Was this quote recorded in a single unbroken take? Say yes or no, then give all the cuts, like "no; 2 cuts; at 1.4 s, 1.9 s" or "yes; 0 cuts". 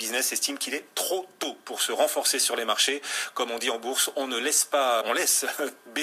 no; 1 cut; at 5.0 s